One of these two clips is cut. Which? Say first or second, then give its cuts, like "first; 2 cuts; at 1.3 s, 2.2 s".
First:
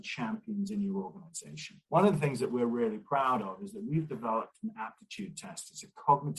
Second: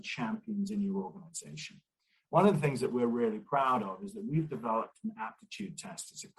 first; 1 cut; at 1.8 s